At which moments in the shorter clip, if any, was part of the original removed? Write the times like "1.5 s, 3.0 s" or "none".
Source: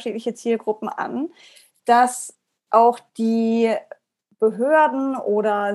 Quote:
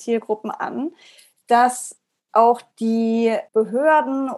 3.5 s